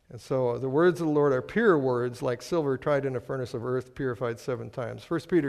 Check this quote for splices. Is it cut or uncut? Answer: uncut